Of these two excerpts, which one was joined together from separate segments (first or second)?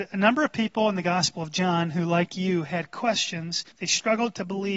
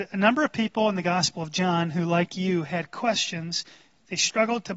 first